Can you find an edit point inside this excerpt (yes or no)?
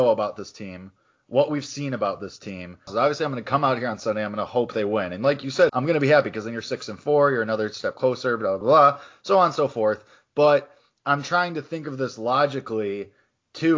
yes